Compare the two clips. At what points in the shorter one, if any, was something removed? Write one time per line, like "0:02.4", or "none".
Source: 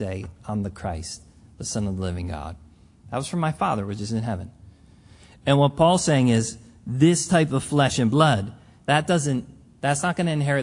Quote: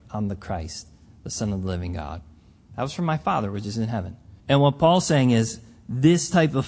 0:04.4